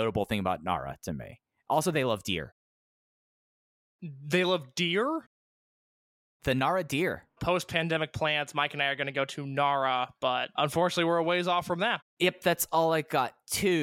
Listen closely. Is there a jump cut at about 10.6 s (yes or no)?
yes